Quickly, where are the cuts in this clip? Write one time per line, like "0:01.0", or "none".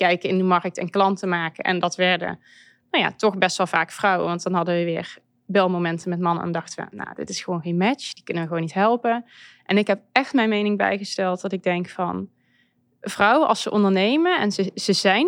none